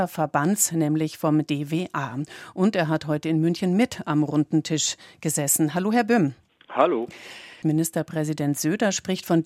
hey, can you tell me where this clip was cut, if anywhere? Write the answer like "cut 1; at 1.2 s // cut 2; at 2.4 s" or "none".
cut 1; at 7.6 s